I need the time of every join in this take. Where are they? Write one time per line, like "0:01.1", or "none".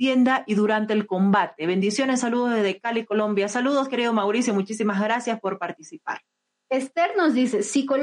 none

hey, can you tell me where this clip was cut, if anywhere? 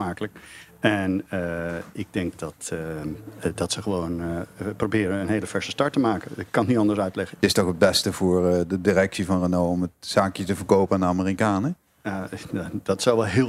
none

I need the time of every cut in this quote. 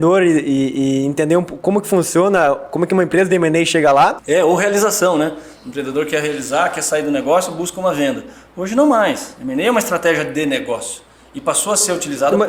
0:04.2

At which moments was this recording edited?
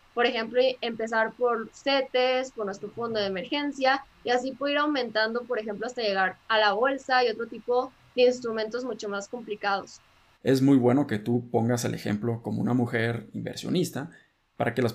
0:10.3

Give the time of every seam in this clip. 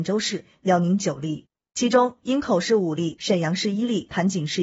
0:03.2

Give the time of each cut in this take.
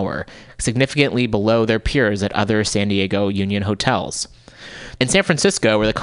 0:05.0

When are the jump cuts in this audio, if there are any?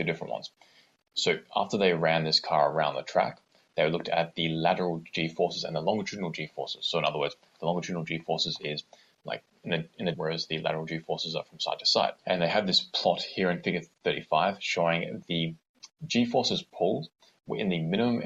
0:10.1
0:12.2

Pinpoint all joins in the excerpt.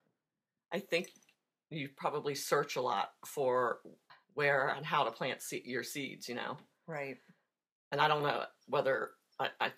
none

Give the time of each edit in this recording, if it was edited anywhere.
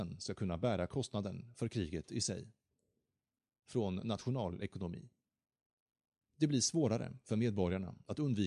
0:06.2

